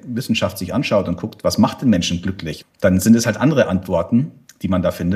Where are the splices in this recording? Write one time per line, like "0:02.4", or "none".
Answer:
0:02.6